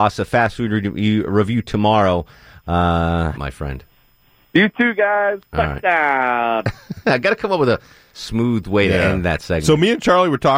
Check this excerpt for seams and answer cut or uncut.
cut